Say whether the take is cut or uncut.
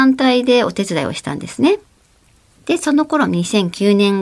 uncut